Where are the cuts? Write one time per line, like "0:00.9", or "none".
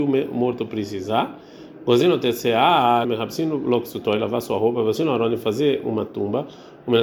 0:03.0